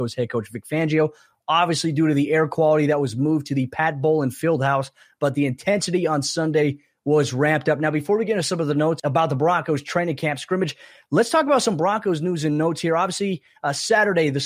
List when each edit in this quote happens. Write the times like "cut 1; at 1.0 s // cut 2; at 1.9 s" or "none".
none

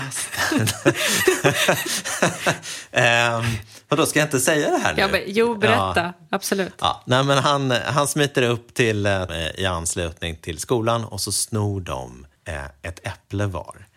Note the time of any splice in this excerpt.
cut 1; at 9.3 s // cut 2; at 12.4 s

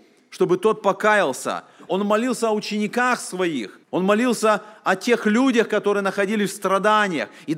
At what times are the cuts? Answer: cut 1; at 1.9 s // cut 2; at 3.8 s

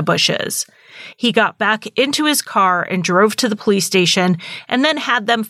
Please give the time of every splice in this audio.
none

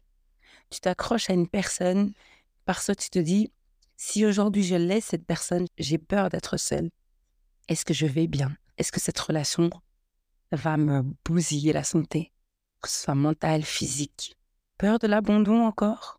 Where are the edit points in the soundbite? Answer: cut 1; at 7.5 s // cut 2; at 14.7 s

